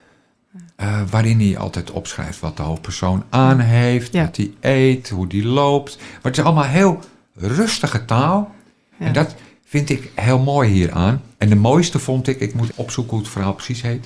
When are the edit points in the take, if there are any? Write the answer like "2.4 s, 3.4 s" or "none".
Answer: 8.9 s, 11.3 s, 12.7 s

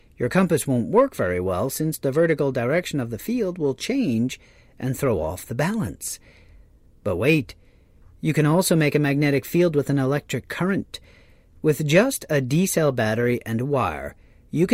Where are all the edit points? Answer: none

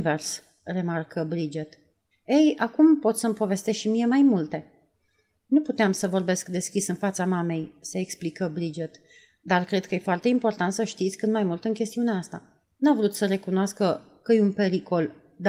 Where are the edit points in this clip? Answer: 2.1 s, 12.7 s

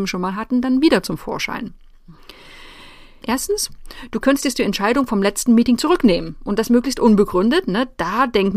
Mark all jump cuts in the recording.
3.2 s

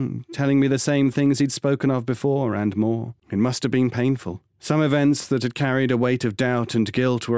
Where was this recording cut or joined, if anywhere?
3.2 s, 4.5 s

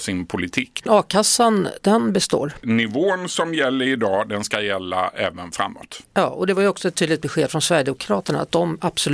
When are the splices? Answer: 6.0 s

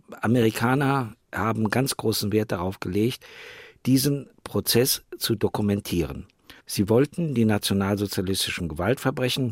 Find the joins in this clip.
6.6 s

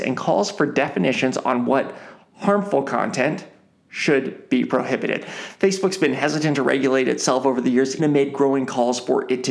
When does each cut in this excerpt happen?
5.2 s, 8.0 s

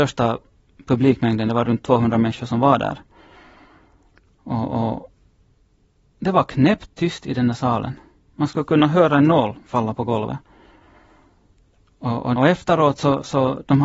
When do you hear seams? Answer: 12.4 s

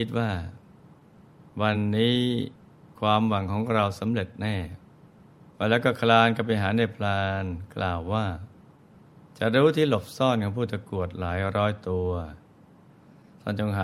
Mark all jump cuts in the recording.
none

